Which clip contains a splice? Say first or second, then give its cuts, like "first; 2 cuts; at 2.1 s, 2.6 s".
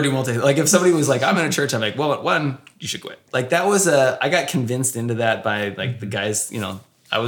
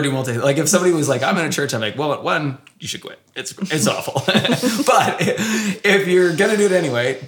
first; 1 cut; at 3.3 s